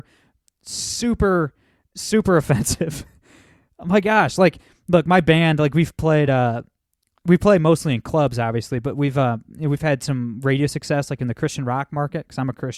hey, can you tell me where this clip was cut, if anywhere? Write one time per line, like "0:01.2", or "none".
none